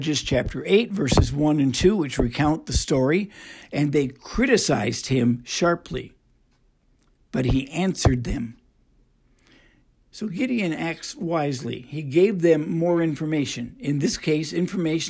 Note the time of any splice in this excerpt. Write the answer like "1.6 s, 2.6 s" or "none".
3.6 s